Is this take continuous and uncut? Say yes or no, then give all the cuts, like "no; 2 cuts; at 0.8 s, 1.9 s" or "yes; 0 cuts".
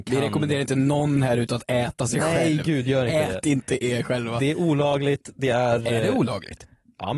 yes; 0 cuts